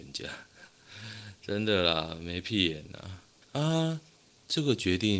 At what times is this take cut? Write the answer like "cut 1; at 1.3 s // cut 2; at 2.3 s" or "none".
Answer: cut 1; at 3.4 s

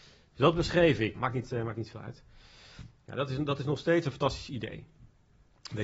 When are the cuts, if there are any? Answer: cut 1; at 1.1 s

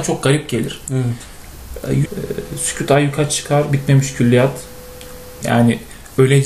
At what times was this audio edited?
cut 1; at 2.1 s // cut 2; at 5.4 s

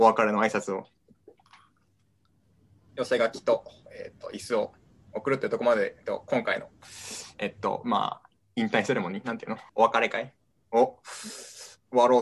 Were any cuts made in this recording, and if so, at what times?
cut 1; at 2.9 s // cut 2; at 9.7 s

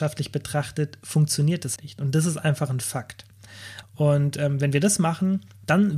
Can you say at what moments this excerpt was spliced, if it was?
cut 1; at 1.8 s // cut 2; at 3.8 s

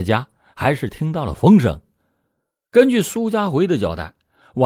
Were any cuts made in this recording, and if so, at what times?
none

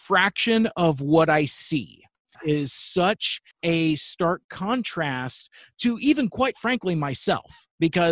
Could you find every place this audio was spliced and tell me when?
cut 1; at 2.3 s // cut 2; at 3.5 s

